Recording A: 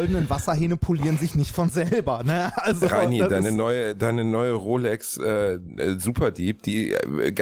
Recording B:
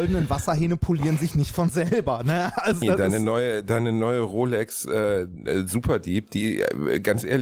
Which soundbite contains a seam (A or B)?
B